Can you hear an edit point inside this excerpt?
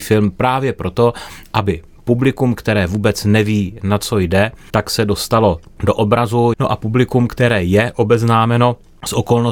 yes; 1 cut; at 6.5 s

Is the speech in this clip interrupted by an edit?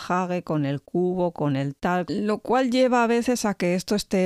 yes; 1 cut; at 2.1 s

